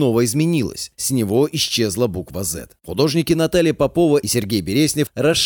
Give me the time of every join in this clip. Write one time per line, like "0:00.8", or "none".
0:02.8

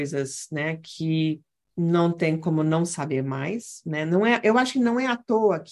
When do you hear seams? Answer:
none

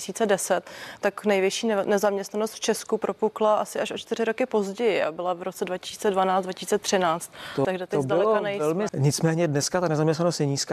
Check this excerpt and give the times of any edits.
0:07.6
0:08.9

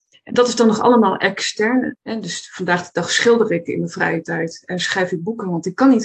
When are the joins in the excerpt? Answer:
0:01.9

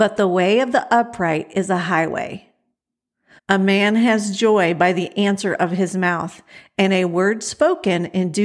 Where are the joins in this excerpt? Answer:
0:03.4

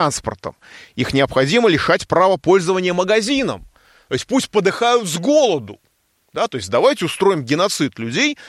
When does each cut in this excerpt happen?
none

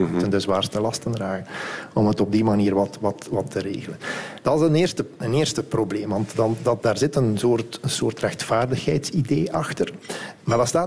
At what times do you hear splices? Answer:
0:06.3

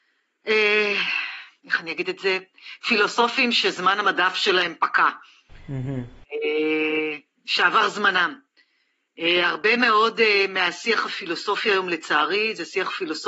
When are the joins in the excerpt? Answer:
none

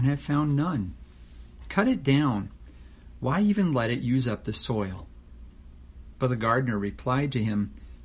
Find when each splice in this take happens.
none

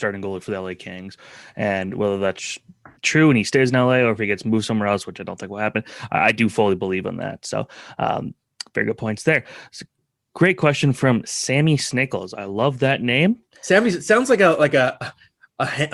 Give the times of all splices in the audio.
0:03.0

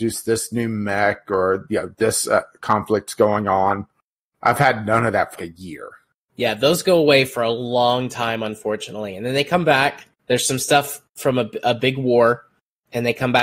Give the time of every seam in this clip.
0:05.4
0:10.1

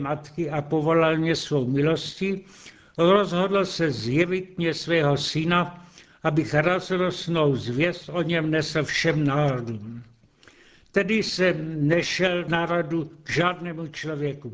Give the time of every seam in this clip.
none

